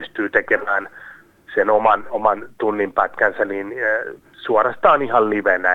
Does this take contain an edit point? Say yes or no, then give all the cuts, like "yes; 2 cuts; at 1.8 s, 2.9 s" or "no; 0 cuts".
yes; 1 cut; at 4.2 s